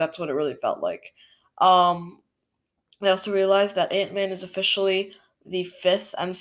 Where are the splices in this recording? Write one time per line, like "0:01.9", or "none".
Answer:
none